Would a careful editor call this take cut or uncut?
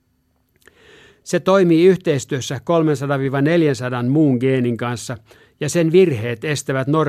cut